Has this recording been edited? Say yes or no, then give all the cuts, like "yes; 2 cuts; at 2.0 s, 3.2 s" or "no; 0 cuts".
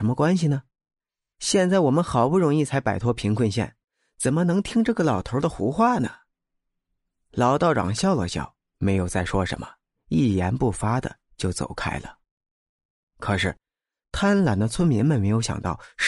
no; 0 cuts